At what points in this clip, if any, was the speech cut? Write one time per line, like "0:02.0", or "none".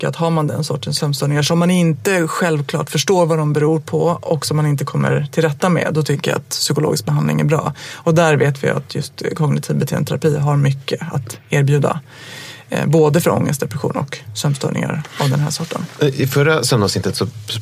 none